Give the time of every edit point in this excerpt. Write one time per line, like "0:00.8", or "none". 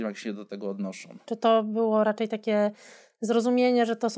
0:01.2